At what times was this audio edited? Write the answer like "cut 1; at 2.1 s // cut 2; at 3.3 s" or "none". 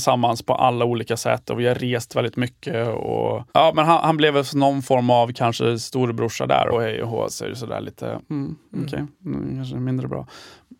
cut 1; at 3.5 s // cut 2; at 6.7 s